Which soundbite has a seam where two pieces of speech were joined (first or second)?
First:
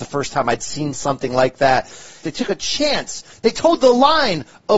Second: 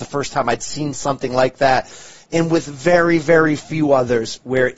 first